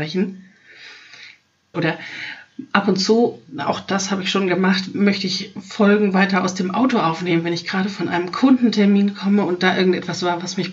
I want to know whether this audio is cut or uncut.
cut